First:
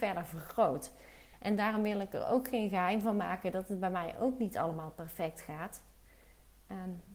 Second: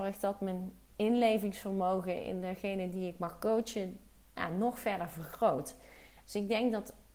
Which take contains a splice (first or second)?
second